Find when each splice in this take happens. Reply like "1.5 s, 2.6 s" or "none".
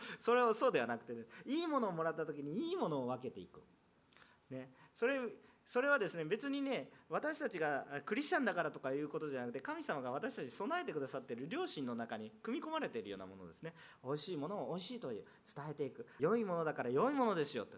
16.2 s